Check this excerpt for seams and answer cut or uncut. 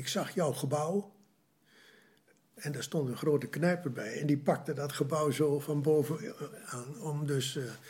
uncut